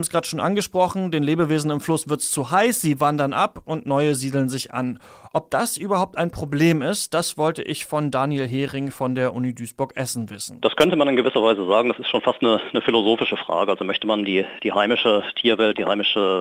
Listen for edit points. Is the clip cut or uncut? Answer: uncut